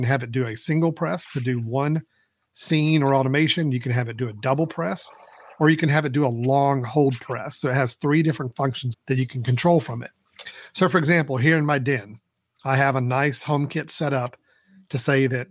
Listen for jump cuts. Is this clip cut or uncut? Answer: cut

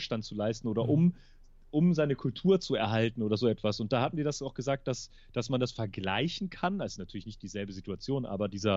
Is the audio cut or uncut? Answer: uncut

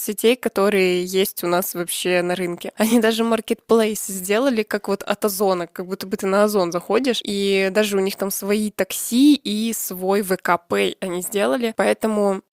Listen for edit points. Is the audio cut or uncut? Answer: cut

